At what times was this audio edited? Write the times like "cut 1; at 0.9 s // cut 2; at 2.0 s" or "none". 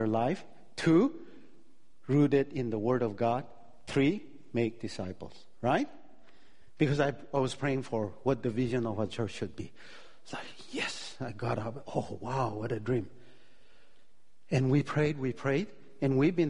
none